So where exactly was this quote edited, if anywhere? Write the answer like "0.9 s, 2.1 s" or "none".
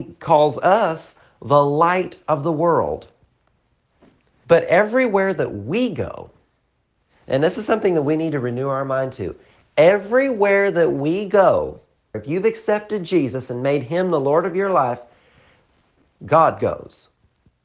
4.4 s, 12.1 s, 16.1 s